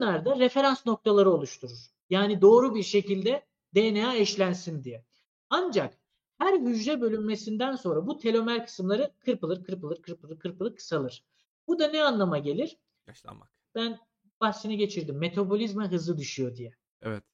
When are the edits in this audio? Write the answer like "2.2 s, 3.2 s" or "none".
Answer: 13.6 s